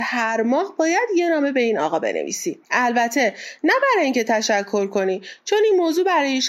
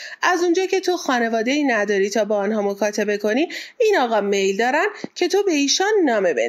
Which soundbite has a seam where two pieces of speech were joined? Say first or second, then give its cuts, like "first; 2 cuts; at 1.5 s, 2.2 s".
first; 1 cut; at 2.6 s